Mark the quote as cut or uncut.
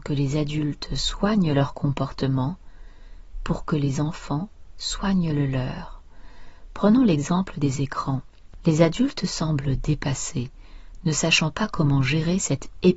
cut